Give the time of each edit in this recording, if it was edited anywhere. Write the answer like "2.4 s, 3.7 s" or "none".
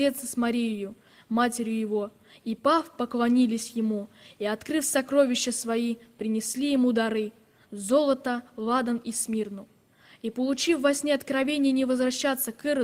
none